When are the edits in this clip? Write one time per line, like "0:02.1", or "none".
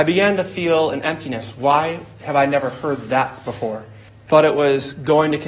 0:04.1